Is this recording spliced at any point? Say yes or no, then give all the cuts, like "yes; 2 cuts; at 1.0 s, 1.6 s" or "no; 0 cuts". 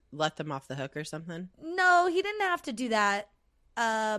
yes; 1 cut; at 1.5 s